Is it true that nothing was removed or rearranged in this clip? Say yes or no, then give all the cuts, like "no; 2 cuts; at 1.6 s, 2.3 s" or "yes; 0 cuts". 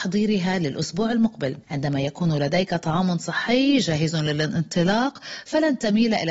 no; 1 cut; at 1.6 s